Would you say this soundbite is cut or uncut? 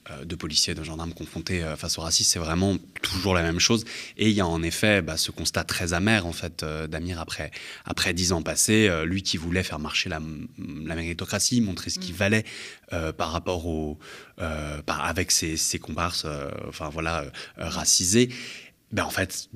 uncut